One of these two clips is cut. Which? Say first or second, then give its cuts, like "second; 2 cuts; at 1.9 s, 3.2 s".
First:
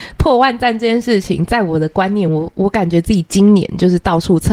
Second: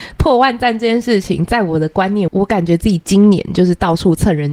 second; 1 cut; at 2.3 s